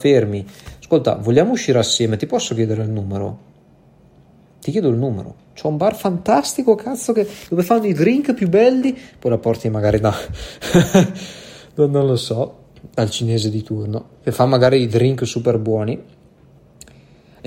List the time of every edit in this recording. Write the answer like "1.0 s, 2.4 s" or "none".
none